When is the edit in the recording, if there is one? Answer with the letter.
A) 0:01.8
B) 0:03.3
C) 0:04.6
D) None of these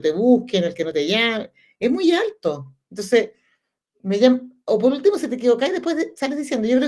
D